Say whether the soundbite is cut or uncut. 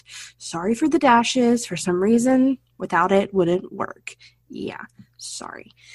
uncut